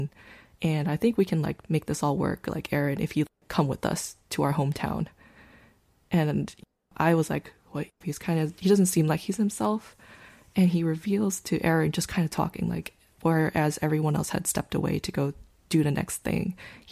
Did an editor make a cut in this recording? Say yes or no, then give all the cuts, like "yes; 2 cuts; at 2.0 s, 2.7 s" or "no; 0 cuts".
yes; 1 cut; at 8.0 s